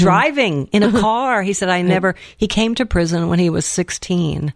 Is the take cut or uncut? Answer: uncut